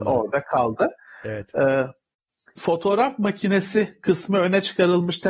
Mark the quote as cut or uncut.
cut